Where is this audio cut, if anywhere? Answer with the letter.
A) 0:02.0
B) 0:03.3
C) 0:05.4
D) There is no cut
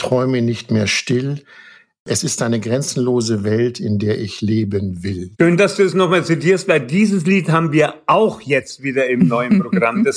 C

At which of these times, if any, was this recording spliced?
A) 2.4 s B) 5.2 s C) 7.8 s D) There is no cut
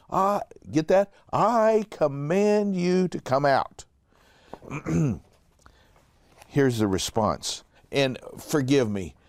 C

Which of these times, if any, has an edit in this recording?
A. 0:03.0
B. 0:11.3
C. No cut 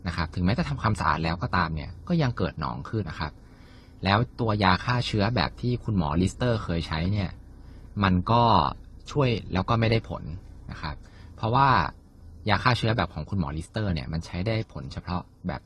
A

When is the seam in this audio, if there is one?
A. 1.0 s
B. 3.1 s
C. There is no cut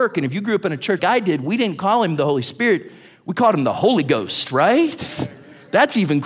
A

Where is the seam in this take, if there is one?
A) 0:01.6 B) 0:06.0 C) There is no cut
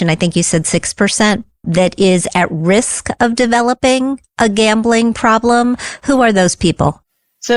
A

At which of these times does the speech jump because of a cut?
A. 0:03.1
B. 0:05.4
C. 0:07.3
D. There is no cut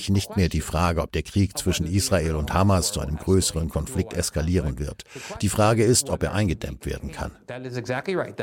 D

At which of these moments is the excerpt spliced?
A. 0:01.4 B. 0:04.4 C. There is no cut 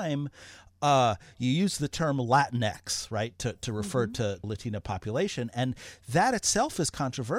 B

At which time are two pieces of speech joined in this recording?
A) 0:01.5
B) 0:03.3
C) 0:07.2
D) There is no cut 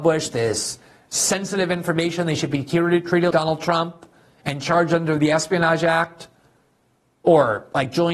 B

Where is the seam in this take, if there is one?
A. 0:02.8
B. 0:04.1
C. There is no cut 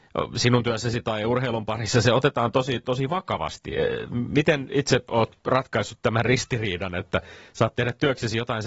A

